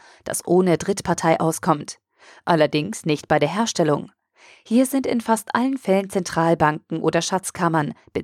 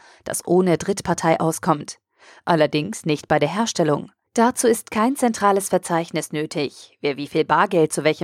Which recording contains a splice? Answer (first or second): second